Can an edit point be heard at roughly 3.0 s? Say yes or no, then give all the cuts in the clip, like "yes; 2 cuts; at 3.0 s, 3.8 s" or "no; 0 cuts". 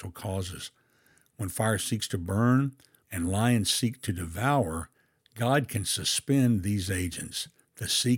yes; 1 cut; at 3.0 s